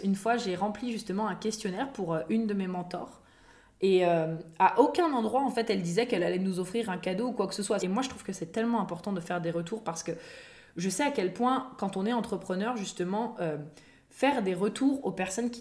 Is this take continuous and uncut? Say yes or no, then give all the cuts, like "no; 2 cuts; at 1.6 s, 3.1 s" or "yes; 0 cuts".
no; 1 cut; at 7.8 s